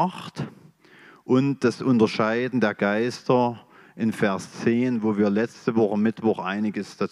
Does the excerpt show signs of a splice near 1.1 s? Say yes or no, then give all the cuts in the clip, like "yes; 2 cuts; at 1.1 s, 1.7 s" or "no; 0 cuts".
no; 0 cuts